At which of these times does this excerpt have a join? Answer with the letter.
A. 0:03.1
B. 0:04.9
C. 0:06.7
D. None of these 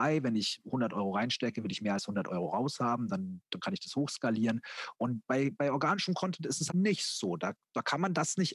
C